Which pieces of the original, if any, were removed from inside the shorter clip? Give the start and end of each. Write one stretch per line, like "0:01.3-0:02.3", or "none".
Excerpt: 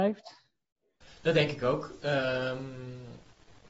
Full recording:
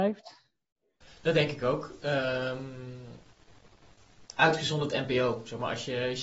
none